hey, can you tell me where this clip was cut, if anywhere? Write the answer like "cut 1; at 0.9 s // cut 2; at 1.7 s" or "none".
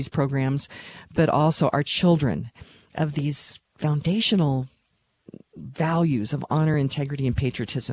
none